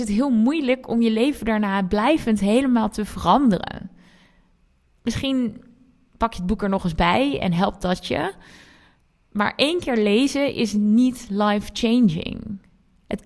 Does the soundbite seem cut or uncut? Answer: uncut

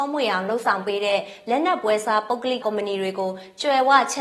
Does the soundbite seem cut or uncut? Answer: cut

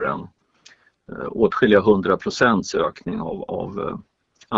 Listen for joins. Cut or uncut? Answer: uncut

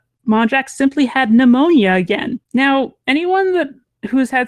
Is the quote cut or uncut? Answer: cut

